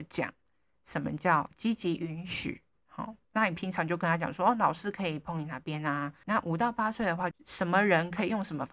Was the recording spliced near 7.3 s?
yes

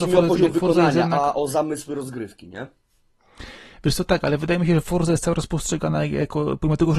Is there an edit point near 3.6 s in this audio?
no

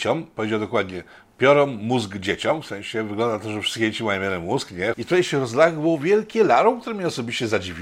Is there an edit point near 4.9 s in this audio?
yes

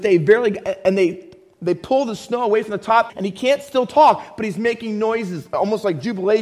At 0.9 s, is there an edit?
no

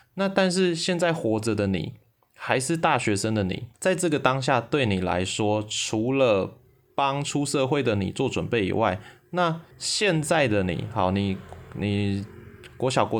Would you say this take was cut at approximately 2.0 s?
no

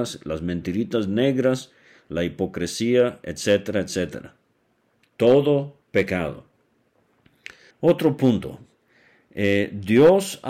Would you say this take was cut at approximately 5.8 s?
yes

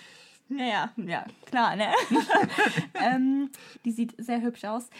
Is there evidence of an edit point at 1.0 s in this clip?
no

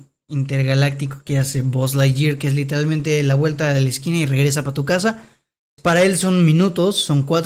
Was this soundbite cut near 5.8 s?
yes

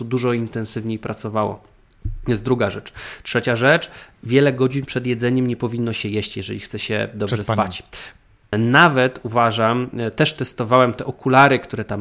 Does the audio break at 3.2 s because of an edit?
no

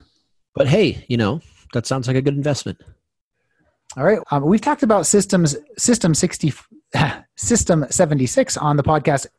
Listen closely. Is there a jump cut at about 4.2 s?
yes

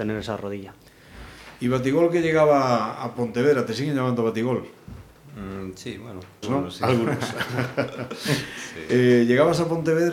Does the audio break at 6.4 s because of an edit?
yes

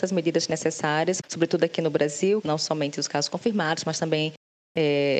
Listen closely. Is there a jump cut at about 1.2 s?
yes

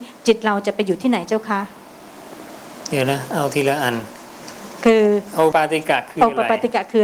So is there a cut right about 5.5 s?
yes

